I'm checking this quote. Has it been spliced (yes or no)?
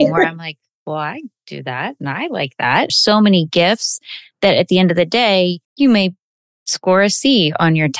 yes